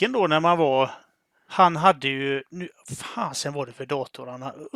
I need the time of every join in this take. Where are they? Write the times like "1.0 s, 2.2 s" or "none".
1.5 s